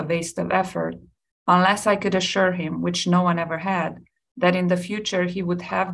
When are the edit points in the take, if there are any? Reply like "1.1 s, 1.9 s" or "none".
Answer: none